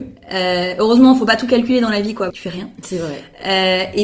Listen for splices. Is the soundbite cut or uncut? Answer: cut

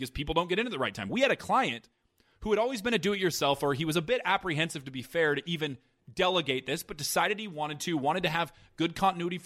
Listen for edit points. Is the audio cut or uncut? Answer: uncut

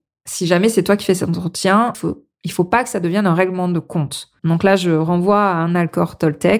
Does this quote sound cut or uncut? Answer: cut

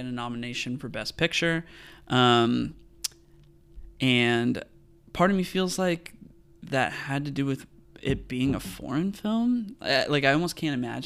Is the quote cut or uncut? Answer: uncut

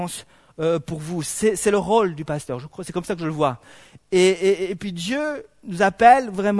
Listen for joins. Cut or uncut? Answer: uncut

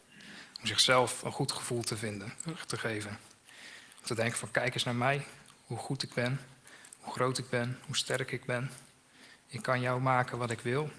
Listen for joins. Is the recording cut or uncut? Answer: uncut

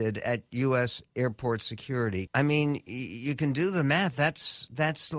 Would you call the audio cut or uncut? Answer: cut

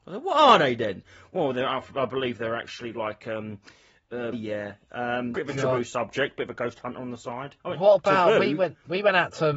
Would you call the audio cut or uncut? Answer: cut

